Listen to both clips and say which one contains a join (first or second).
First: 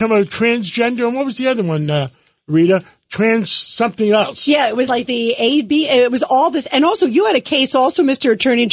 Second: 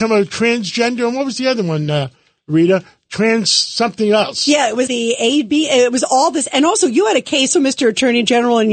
second